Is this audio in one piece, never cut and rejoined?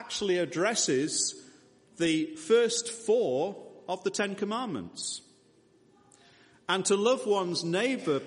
yes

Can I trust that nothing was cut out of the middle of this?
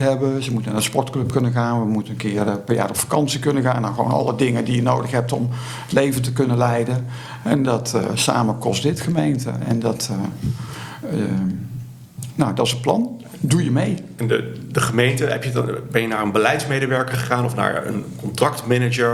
yes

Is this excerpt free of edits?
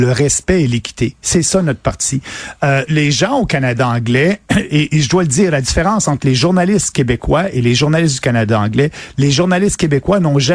no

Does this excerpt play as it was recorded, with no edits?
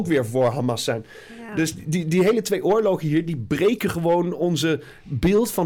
yes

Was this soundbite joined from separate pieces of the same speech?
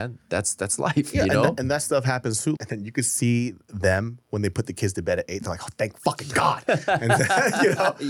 yes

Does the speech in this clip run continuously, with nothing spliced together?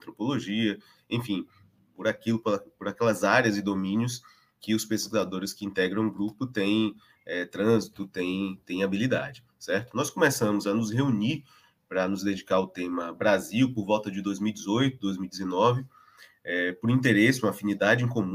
yes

